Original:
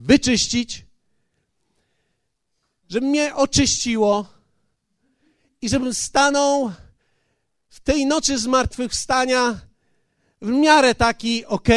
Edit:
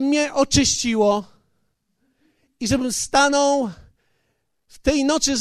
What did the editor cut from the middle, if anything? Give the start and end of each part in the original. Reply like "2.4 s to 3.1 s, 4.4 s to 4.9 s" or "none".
none